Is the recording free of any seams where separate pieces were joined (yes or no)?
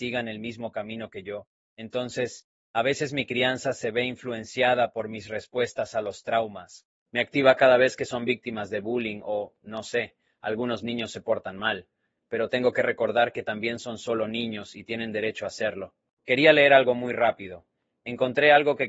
yes